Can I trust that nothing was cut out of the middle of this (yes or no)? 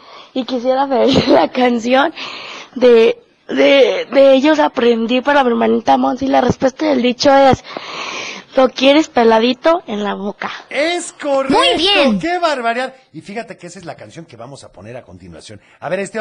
yes